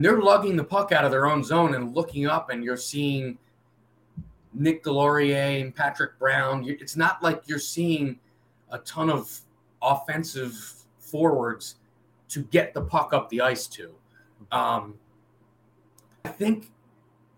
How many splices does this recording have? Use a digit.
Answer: 1